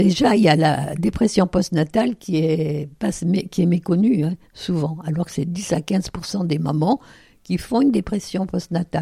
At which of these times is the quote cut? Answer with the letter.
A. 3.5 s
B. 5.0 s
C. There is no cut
C